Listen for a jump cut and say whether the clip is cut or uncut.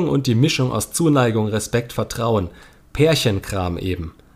uncut